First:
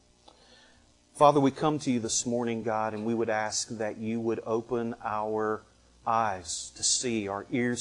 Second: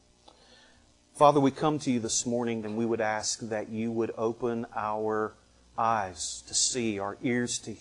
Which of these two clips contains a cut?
second; 1 cut; at 2.6 s

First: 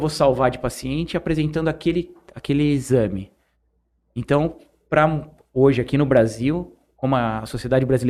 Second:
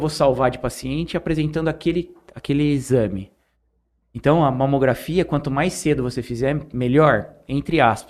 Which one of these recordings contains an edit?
second; 1 cut; at 4.0 s

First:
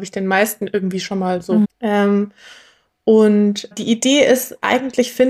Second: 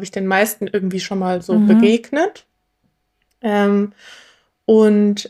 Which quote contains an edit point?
first; 2 cuts; at 1.6 s, 3.7 s

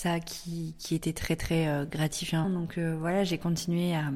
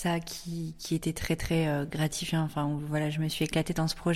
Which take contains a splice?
first; 1 cut; at 2.4 s

